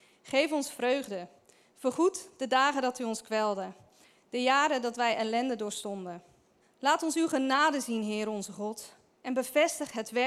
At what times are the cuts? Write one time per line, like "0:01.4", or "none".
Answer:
0:06.6